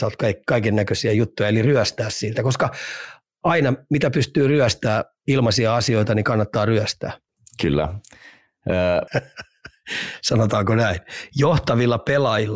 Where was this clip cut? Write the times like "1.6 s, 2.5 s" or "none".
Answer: 9.1 s